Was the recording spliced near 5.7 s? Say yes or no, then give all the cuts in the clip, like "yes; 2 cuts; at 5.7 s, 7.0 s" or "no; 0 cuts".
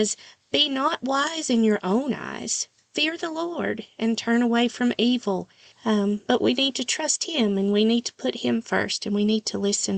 yes; 1 cut; at 5.7 s